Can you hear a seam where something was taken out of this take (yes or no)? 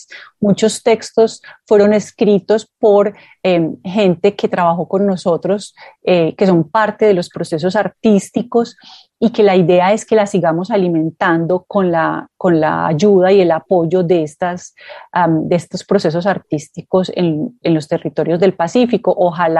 yes